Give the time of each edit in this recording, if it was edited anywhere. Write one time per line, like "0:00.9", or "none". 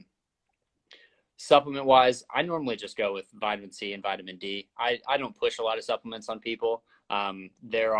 none